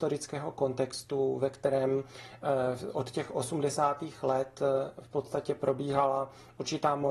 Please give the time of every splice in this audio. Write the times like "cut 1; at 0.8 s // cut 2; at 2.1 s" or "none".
none